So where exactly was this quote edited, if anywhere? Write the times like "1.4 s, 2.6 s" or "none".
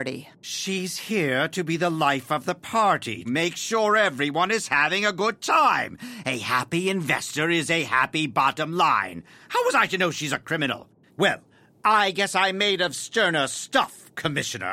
3.2 s, 11.1 s